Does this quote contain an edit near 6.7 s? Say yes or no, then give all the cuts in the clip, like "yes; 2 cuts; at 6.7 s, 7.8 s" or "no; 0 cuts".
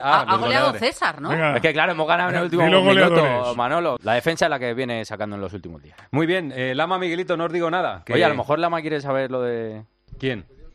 no; 1 cut; at 4.0 s